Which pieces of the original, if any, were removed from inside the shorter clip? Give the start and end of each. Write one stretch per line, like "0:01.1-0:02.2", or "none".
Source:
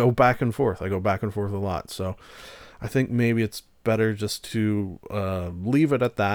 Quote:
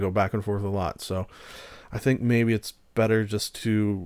none